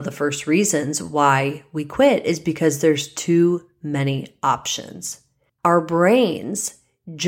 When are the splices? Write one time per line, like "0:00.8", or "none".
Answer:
0:05.5